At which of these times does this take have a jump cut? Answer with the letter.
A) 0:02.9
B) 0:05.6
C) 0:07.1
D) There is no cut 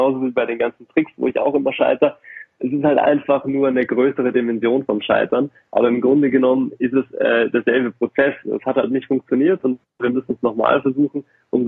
D